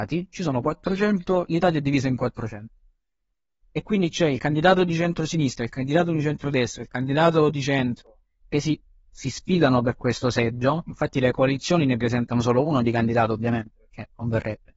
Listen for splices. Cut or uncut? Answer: uncut